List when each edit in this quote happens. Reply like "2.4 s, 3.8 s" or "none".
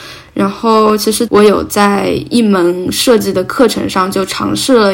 1.3 s